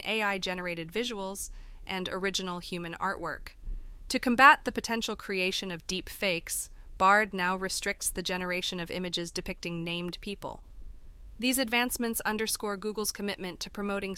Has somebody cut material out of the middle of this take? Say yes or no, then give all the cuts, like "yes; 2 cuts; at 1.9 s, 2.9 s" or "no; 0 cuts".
no; 0 cuts